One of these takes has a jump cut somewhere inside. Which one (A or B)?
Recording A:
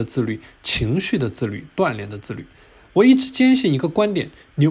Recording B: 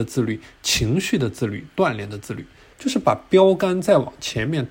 B